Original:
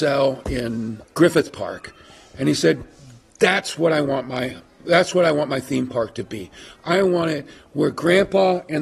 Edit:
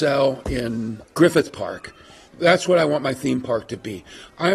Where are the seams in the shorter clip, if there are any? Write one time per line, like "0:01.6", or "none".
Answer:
0:02.2